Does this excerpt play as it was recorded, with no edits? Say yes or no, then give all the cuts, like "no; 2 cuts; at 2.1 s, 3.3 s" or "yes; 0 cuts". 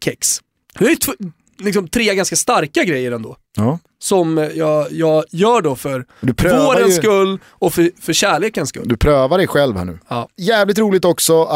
yes; 0 cuts